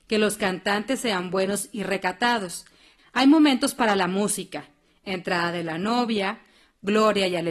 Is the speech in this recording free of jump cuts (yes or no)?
no